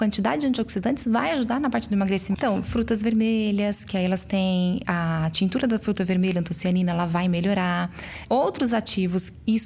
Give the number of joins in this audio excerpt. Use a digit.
2